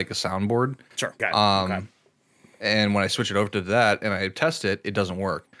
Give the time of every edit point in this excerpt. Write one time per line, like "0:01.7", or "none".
0:01.2